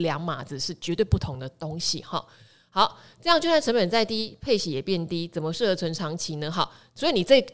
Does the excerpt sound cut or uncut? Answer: uncut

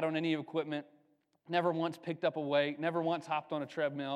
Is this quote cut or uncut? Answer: uncut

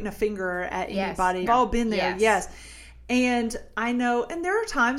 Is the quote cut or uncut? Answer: cut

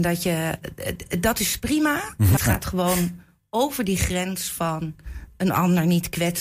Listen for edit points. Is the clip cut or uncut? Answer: cut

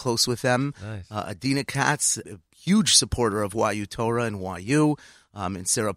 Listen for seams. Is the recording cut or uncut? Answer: cut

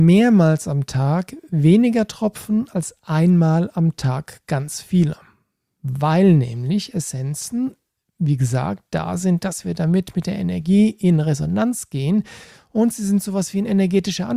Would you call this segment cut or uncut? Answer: uncut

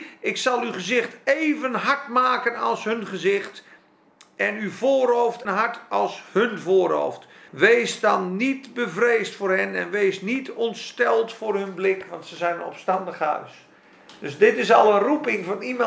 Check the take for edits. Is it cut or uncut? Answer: cut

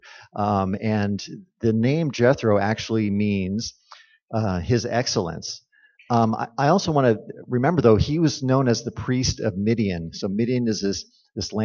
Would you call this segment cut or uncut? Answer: cut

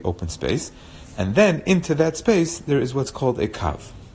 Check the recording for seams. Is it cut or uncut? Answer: uncut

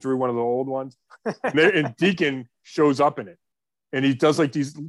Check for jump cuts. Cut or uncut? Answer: uncut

